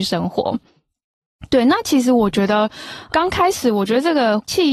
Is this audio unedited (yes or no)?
yes